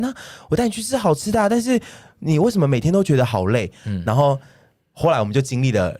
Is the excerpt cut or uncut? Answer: uncut